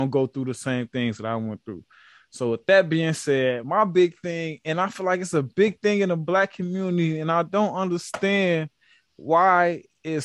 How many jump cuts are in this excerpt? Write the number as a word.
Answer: zero